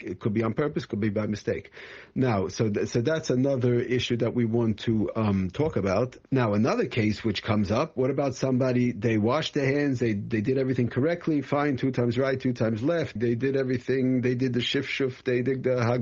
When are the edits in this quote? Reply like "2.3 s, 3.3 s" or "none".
6.3 s, 13.2 s